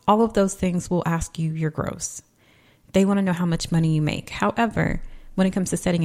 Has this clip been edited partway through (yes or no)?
no